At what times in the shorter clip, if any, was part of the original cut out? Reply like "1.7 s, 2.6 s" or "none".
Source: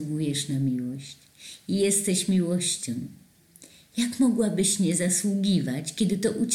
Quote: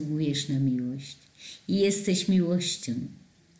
none